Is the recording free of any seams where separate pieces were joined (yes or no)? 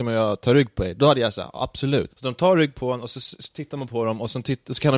no